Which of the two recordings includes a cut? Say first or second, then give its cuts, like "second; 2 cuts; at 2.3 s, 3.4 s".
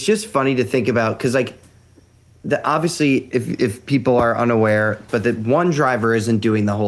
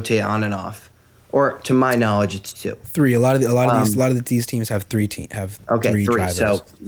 first; 1 cut; at 5.1 s